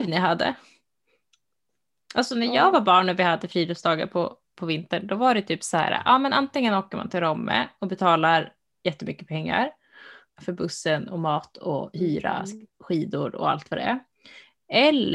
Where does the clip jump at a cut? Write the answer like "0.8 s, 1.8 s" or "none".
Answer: 10.3 s